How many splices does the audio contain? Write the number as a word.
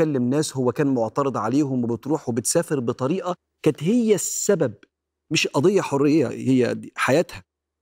one